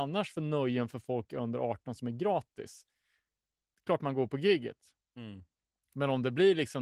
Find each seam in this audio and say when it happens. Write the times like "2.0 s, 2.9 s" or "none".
none